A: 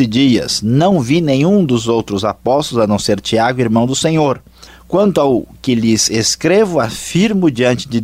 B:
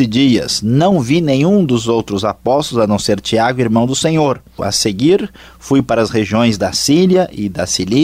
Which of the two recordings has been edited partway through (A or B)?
B